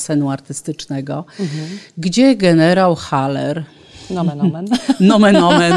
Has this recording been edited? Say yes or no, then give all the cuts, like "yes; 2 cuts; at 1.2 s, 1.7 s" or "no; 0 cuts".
no; 0 cuts